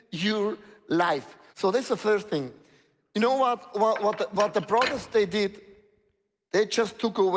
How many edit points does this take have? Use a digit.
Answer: 1